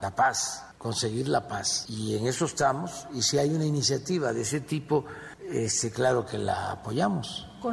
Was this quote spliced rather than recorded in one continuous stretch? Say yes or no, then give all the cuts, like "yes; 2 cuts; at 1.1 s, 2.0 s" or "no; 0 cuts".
no; 0 cuts